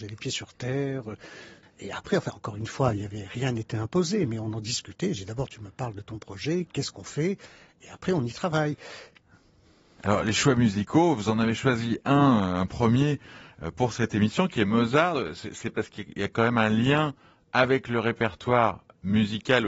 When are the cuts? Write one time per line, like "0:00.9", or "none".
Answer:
0:01.6